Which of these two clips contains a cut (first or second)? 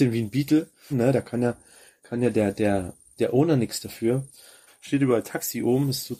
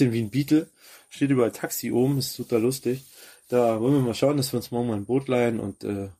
first